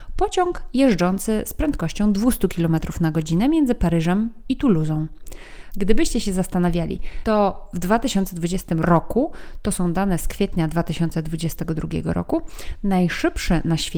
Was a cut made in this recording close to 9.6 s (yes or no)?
no